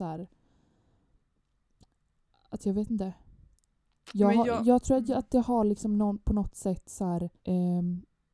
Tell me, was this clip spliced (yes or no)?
yes